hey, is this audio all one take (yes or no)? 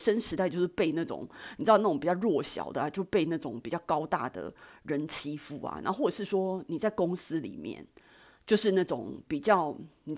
yes